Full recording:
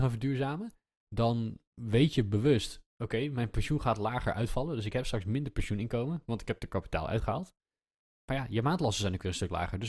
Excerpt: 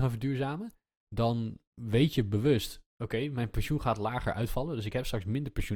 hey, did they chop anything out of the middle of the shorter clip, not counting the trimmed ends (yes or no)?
no